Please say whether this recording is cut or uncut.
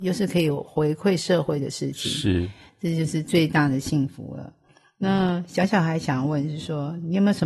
uncut